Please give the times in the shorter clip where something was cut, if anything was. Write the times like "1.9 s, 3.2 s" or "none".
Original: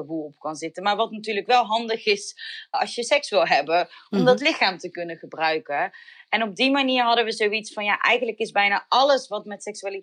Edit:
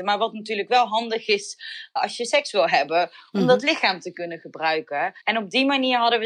5.2 s